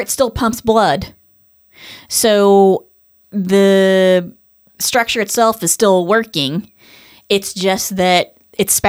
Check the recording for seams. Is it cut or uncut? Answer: uncut